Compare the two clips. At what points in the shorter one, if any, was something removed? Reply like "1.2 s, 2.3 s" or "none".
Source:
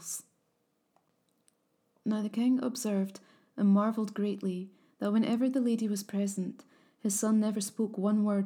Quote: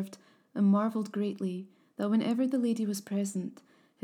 none